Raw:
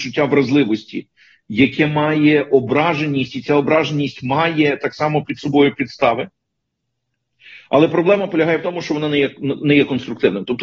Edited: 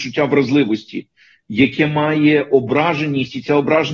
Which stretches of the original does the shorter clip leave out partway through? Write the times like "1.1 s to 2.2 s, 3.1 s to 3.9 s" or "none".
none